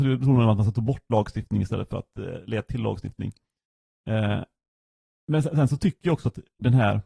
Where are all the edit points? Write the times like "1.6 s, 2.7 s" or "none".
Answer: none